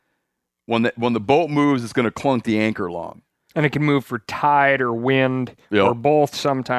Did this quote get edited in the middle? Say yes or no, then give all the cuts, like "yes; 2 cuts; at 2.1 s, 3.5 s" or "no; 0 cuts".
no; 0 cuts